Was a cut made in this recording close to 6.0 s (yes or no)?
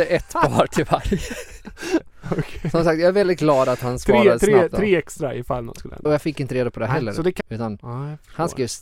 yes